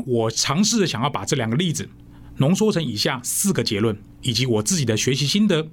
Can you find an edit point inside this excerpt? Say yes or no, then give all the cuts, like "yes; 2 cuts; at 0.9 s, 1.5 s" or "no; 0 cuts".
no; 0 cuts